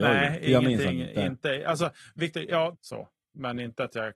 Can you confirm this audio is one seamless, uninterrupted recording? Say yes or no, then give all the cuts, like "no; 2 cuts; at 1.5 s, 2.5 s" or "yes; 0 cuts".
no; 1 cut; at 2.7 s